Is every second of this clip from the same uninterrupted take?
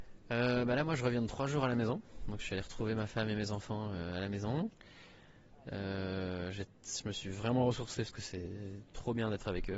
yes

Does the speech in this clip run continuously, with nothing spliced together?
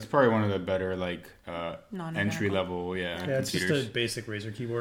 yes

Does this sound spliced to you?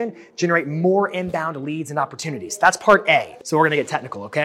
yes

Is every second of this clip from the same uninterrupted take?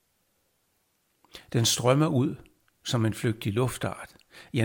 yes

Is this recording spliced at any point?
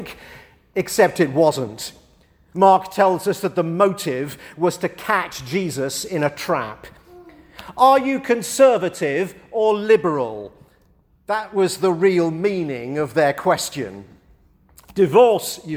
no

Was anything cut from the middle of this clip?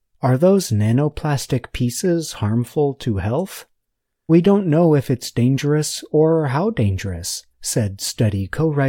yes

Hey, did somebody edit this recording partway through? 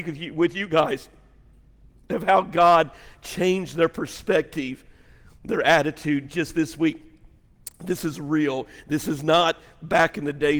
no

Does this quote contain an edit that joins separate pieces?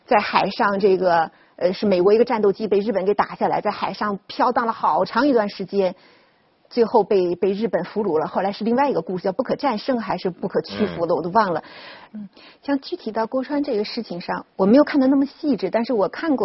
yes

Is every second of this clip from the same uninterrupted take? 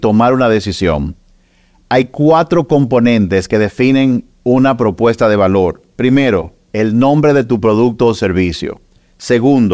yes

